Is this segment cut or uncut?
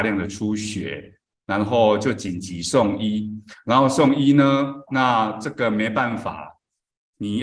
cut